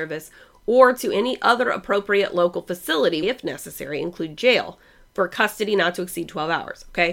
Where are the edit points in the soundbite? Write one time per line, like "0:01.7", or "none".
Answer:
0:03.2